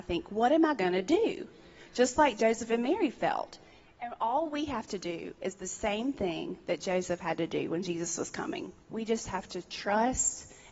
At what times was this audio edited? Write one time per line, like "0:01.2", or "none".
none